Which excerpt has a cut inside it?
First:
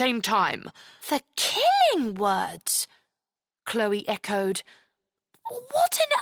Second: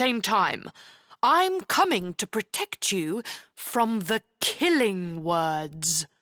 first; 1 cut; at 1.0 s

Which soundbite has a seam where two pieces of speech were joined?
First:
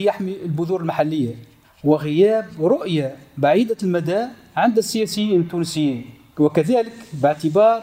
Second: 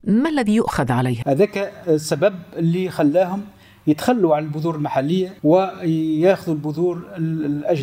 second; 2 cuts; at 1.2 s, 5.4 s

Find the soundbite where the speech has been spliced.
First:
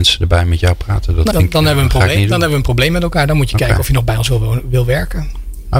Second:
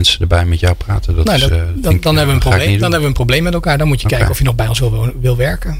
first; 1 cut; at 1.3 s

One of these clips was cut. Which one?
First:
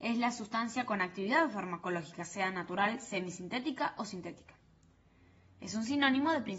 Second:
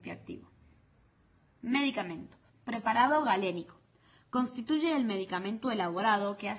second; 1 cut; at 2.5 s

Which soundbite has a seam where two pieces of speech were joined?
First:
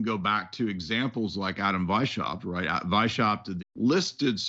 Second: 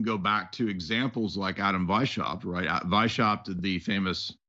first; 1 cut; at 3.6 s

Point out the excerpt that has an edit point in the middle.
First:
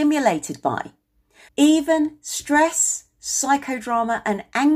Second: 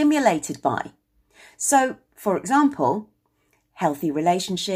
first; 1 cut; at 1.5 s

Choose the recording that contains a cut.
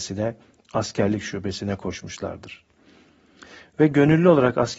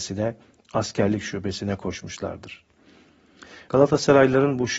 second; 1 cut; at 3.7 s

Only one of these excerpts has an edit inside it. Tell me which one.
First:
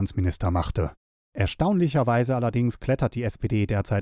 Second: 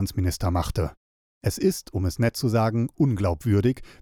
first; 1 cut; at 1.2 s

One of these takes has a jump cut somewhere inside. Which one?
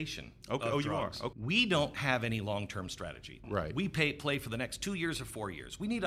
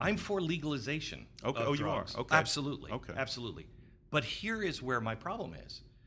first; 2 cuts; at 1.3 s, 3.4 s

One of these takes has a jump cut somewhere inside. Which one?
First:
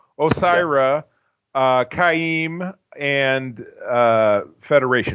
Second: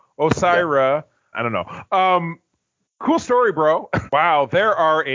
second; 2 cuts; at 1.3 s, 4.1 s

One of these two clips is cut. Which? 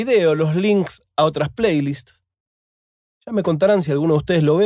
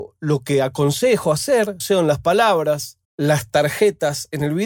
second; 2 cuts; at 1.8 s, 3.0 s

